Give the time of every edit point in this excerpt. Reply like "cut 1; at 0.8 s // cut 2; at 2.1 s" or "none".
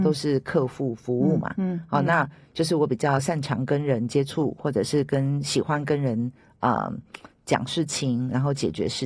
none